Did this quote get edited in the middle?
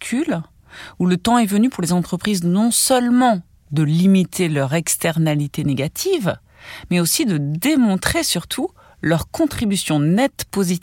no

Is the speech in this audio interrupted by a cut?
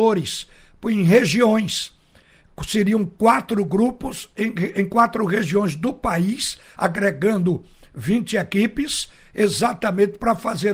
no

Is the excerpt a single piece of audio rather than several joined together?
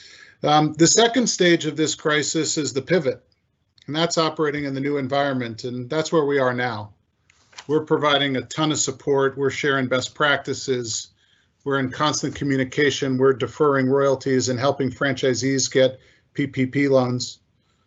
yes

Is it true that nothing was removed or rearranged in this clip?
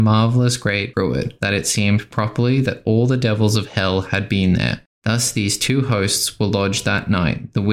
no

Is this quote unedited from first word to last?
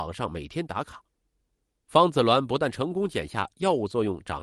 yes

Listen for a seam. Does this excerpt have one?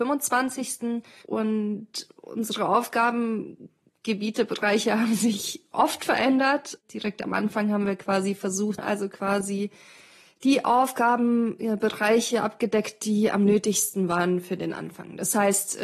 yes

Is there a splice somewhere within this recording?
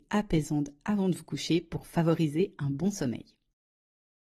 no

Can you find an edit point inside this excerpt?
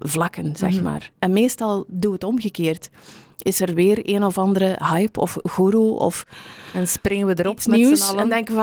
no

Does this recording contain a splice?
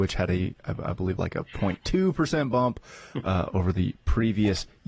yes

